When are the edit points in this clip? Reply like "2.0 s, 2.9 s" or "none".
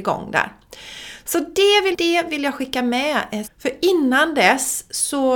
1.9 s, 3.4 s